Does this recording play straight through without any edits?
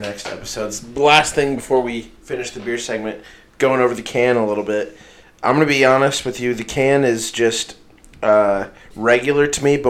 yes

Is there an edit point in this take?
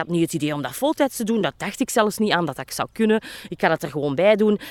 no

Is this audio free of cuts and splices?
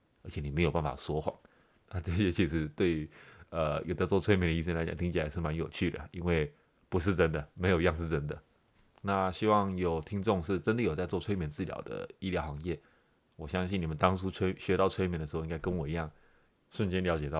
yes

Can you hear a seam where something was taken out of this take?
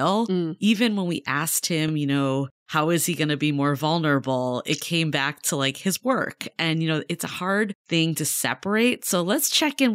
no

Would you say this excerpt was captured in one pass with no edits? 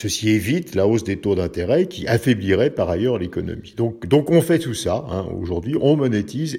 yes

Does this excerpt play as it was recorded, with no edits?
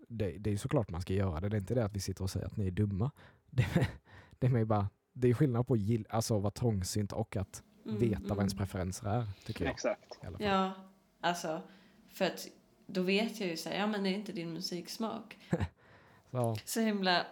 no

